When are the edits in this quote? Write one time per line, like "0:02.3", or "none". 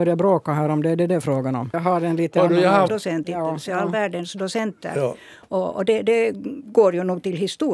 0:01.7
0:02.9

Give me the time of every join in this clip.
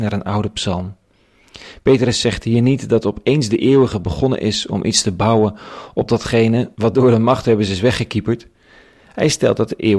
0:06.7

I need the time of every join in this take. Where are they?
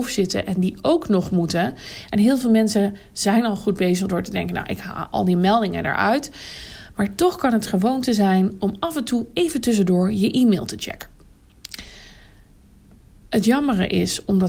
0:02.1

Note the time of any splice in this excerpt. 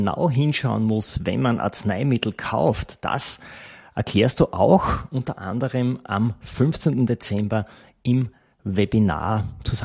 none

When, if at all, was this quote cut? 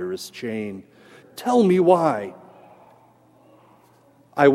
0:01.2

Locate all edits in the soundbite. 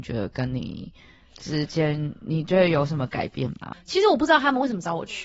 0:03.7

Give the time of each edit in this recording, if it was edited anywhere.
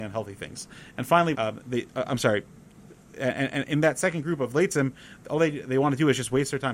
0:01.3

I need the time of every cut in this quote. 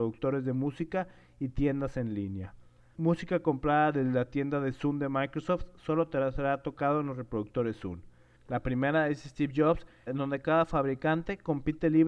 0:02.9
0:08.4
0:10.1

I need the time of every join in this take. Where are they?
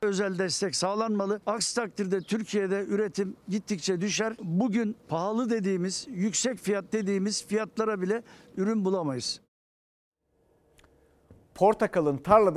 0:05.0

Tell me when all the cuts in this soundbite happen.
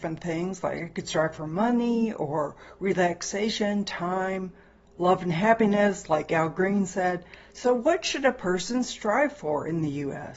none

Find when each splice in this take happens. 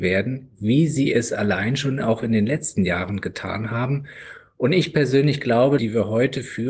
0:05.8

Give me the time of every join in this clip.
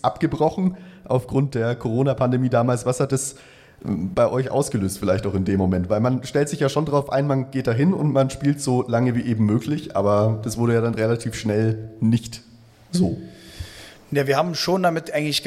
none

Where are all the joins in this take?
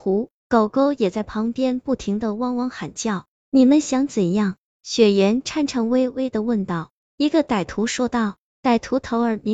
0:07.0

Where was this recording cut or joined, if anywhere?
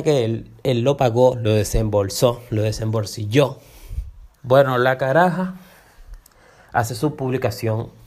0:04.4

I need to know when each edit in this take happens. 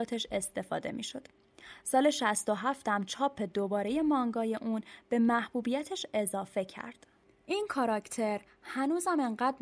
none

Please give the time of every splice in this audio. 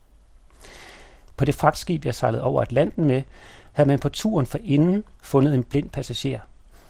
0:01.2
0:05.1

